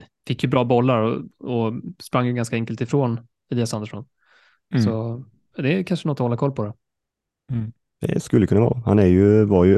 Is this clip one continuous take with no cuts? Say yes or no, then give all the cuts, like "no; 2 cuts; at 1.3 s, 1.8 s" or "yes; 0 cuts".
yes; 0 cuts